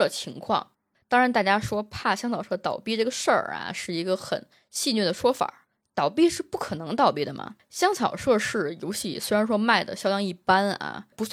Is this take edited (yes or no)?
no